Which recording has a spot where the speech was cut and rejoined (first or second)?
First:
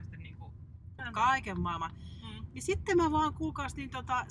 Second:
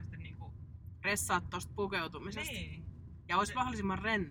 first